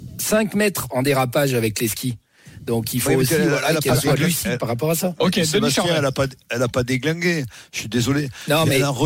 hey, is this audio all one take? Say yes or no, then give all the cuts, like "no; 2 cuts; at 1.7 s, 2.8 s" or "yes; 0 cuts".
yes; 0 cuts